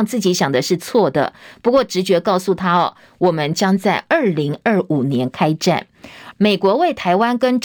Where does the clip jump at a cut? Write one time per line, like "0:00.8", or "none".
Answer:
0:06.3